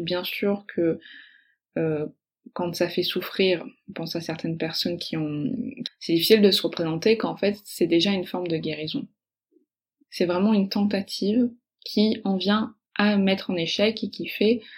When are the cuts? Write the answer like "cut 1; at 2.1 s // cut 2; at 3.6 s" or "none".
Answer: cut 1; at 5.8 s // cut 2; at 10.0 s // cut 3; at 12.8 s